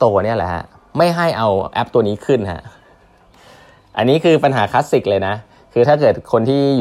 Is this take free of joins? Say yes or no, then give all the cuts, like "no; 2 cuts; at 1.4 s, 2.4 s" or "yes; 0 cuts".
yes; 0 cuts